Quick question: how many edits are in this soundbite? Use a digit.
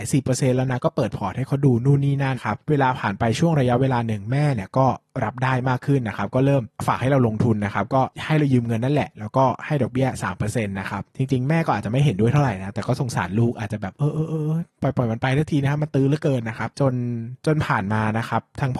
1